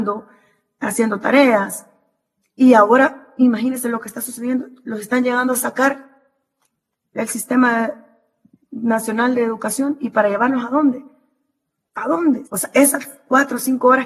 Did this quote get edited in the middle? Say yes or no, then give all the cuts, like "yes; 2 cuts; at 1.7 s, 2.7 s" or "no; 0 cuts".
yes; 1 cut; at 12.4 s